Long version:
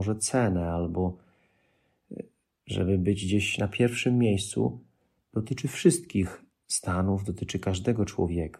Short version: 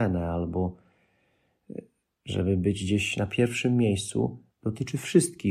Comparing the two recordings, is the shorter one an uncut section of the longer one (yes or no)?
no